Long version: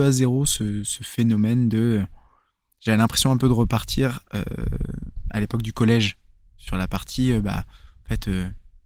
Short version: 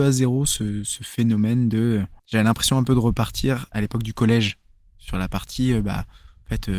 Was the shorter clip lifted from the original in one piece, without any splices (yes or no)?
no